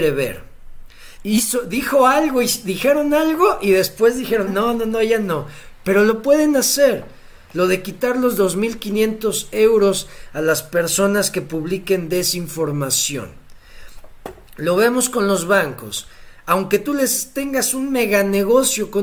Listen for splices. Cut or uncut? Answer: cut